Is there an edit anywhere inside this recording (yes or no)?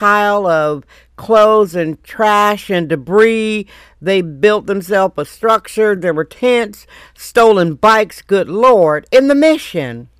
no